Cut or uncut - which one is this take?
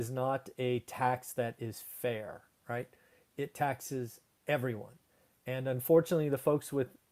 uncut